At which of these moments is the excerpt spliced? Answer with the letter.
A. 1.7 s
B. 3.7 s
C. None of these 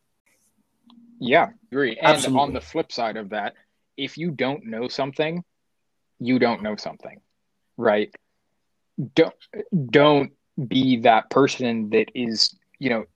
A